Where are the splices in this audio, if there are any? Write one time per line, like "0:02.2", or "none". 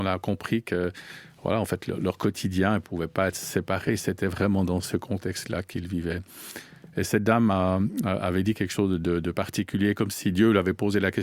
none